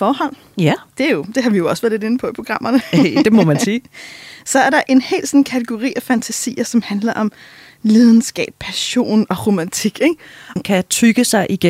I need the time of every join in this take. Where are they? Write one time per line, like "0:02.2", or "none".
0:10.6